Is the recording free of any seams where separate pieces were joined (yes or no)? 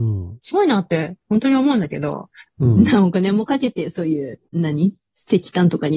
no